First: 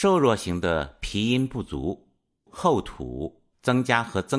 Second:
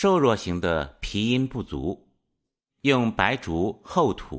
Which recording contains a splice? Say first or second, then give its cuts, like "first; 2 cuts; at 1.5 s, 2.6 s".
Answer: first; 1 cut; at 2.5 s